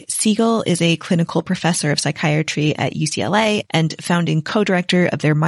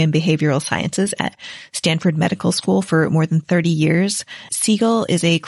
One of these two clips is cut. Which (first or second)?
second